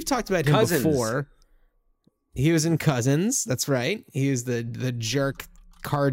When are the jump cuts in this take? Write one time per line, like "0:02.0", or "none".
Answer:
none